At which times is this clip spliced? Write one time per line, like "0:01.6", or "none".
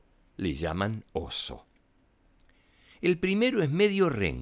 none